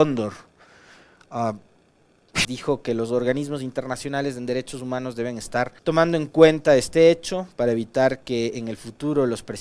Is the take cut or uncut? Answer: cut